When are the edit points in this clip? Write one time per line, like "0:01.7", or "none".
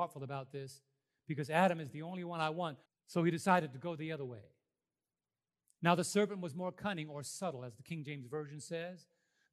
0:02.9

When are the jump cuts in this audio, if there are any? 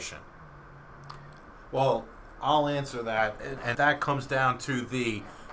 0:01.5
0:03.7

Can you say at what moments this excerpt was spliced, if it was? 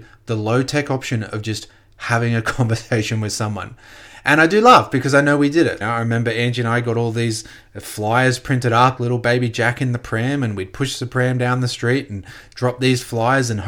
0:05.8
0:09.0

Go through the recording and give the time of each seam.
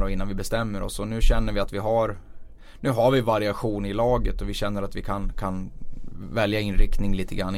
none

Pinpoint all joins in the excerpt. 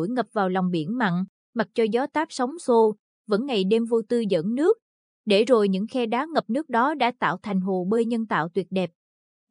none

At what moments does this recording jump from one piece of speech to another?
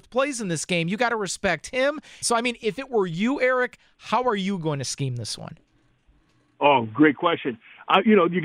0:02.2

